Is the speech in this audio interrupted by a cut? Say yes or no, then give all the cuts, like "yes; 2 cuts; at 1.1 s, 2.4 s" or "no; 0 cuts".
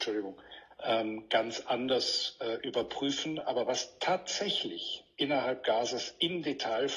no; 0 cuts